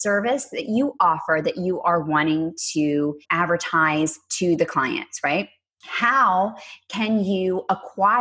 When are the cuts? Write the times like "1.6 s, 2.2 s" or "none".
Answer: 3.2 s